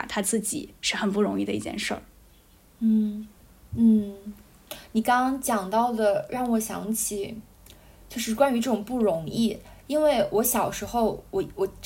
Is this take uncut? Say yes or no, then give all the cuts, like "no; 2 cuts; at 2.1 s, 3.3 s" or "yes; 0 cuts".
yes; 0 cuts